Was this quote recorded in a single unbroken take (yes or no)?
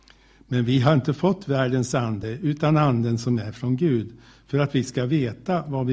yes